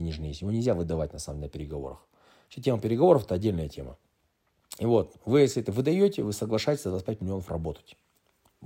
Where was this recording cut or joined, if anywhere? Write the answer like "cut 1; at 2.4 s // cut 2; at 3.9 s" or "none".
none